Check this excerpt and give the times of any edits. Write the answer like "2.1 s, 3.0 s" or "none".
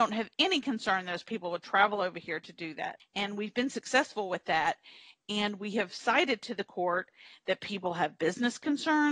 3.0 s